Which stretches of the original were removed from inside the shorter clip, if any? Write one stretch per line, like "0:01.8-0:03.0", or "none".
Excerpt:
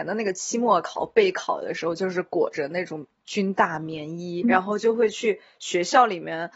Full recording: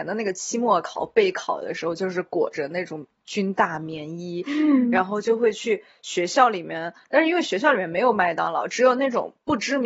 0:04.4-0:04.9